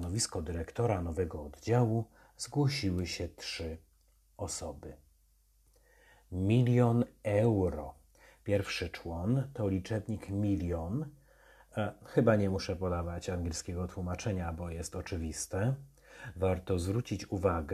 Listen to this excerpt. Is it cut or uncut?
uncut